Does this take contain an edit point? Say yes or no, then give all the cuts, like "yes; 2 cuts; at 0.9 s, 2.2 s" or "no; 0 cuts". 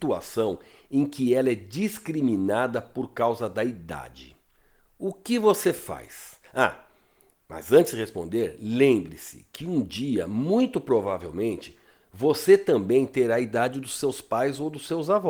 no; 0 cuts